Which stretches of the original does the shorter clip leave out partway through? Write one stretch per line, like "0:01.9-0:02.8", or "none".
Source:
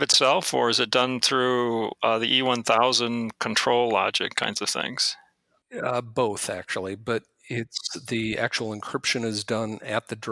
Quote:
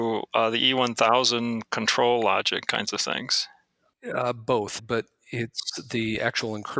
0:06.5-0:07.0